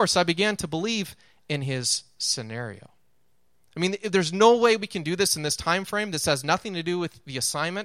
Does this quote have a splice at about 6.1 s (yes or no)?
no